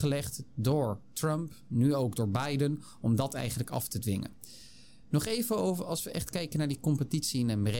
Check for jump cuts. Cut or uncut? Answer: uncut